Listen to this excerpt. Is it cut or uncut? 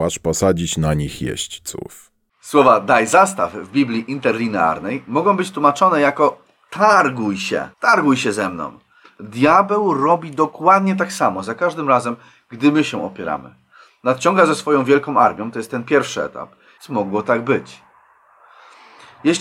cut